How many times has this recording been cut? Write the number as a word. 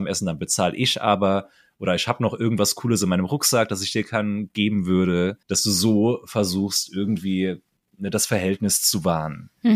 one